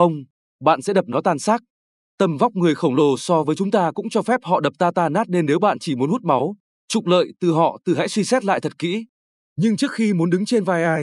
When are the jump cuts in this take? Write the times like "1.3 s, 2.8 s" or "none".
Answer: 9.4 s